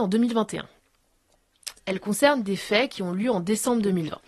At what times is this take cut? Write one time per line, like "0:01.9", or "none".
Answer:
0:01.8